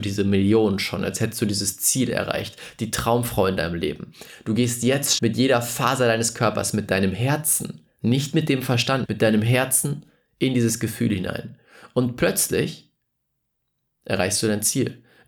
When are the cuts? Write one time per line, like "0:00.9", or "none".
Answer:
0:05.2
0:09.0